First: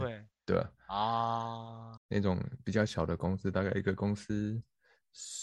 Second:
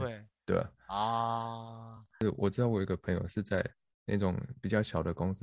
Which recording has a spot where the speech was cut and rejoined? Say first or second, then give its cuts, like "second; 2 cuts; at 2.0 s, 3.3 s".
first; 1 cut; at 2.0 s